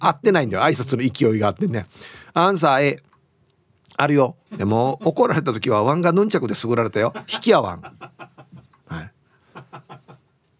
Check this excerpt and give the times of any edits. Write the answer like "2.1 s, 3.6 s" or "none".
4.5 s